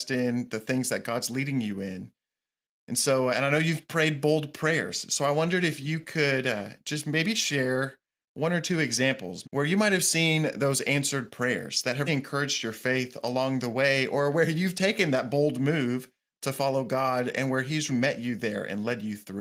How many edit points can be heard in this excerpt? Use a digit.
3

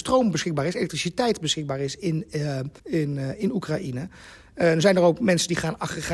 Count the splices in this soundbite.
1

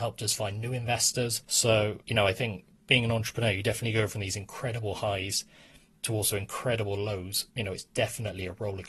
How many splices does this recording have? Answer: 1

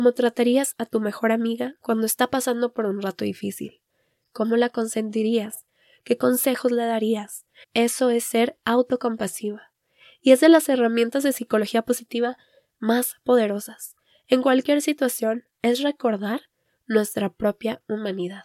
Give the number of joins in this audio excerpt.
1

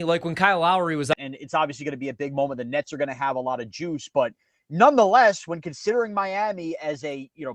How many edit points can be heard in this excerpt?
1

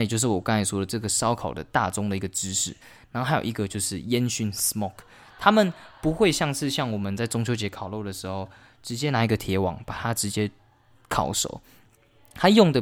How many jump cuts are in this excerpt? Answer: 0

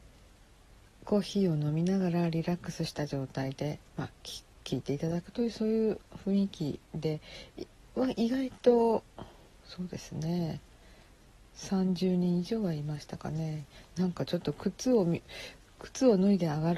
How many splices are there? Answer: 1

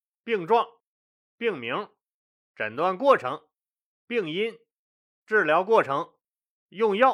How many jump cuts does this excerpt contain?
0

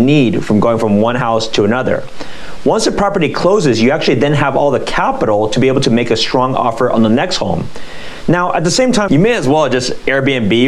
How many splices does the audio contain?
1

